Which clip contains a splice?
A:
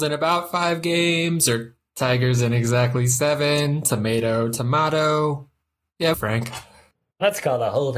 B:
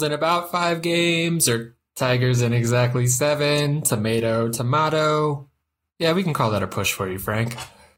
A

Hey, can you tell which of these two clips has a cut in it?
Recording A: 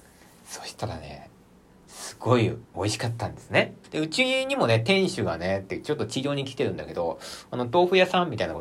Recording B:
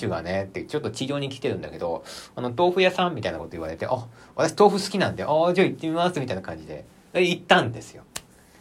A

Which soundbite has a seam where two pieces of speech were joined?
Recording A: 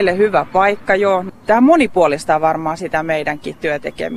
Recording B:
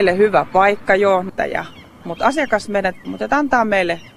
B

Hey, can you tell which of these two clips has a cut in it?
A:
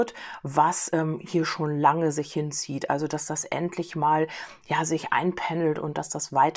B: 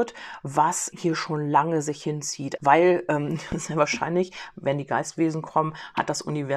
B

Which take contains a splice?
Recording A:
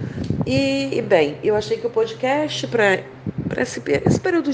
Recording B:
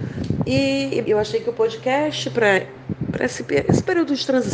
B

